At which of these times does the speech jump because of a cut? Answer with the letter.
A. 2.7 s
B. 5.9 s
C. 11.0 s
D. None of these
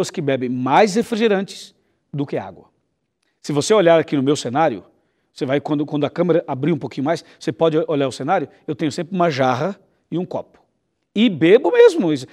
D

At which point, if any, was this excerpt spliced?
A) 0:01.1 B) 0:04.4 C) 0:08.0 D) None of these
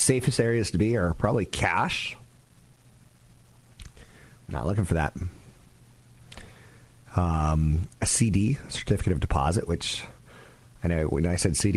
B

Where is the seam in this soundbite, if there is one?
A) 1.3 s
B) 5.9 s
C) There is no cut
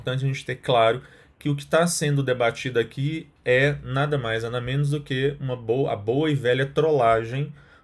C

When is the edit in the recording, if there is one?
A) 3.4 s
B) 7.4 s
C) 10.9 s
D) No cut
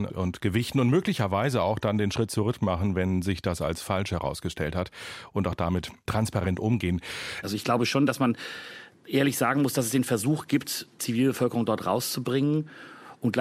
B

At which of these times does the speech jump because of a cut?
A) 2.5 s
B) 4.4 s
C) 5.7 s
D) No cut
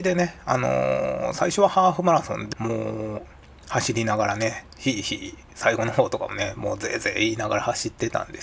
A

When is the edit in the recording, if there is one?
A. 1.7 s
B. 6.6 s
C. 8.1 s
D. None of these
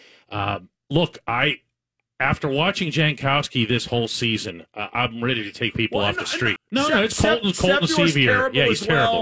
B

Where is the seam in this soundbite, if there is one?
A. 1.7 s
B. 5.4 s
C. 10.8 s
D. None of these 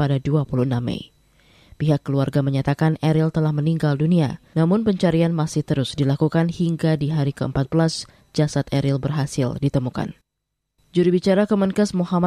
C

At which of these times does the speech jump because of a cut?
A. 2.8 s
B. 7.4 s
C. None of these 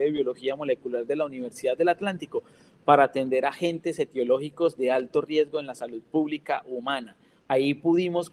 B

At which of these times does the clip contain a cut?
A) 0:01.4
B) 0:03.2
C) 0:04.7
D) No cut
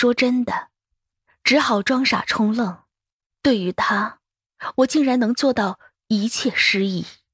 B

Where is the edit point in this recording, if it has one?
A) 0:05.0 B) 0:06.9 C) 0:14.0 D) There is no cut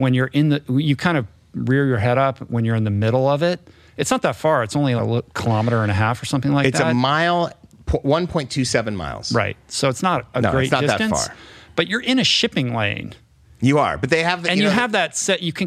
A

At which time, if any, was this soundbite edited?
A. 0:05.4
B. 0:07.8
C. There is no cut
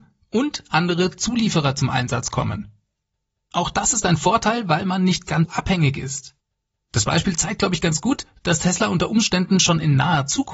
A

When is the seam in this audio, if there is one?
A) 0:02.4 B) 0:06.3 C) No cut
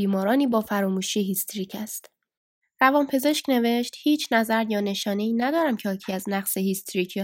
C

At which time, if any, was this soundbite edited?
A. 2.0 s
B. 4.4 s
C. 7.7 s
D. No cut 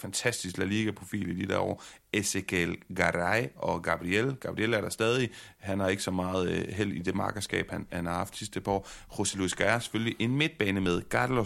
D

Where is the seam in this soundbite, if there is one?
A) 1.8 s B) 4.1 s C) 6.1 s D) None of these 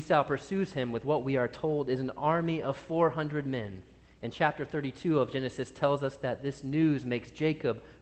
D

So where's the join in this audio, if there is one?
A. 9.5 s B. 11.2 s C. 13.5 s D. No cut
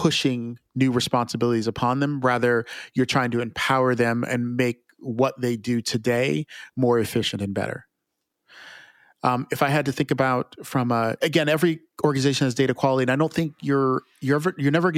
B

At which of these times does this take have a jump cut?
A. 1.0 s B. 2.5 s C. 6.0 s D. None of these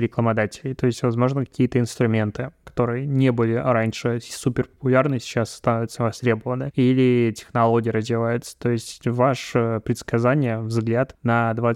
C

